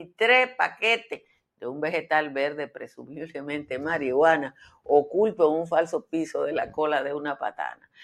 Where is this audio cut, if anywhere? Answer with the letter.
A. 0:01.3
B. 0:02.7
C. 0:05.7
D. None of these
D